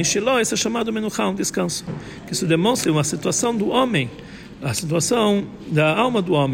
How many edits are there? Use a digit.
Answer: 1